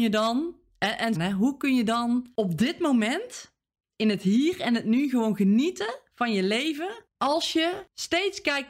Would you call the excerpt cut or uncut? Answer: cut